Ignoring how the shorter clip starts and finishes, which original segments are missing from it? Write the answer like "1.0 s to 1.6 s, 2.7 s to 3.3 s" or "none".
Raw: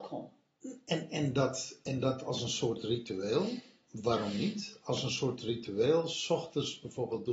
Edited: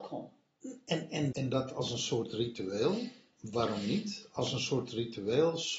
1.3 s to 1.8 s